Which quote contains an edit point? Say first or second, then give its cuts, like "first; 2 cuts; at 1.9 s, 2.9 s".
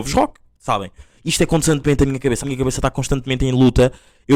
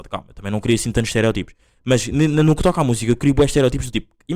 first; 1 cut; at 2.4 s